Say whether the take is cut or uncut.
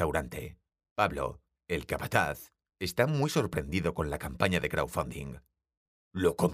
uncut